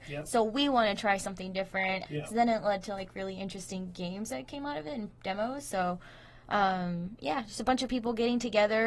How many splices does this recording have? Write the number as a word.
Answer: one